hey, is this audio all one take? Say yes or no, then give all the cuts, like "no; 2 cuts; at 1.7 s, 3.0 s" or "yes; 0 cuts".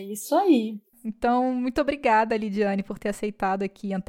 yes; 0 cuts